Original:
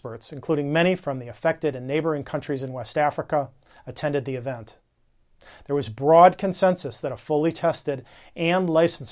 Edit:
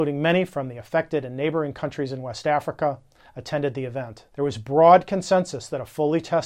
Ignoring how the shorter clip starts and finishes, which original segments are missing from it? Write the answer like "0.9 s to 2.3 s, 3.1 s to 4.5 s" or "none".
4.8 s to 5.6 s